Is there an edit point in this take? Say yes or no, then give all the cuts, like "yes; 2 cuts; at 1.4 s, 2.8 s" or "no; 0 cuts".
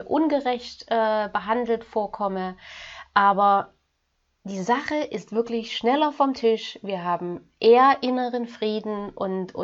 no; 0 cuts